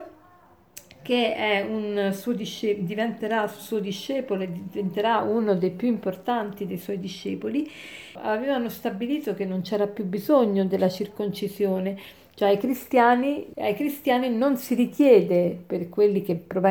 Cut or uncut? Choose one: cut